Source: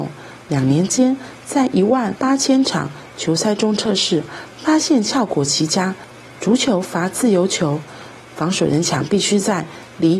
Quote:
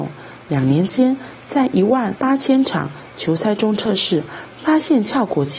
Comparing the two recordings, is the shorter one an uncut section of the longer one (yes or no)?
yes